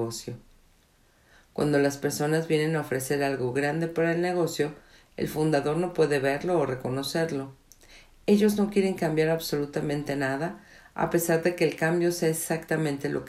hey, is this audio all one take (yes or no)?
yes